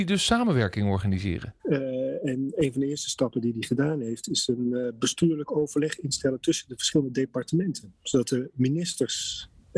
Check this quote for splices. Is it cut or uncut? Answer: cut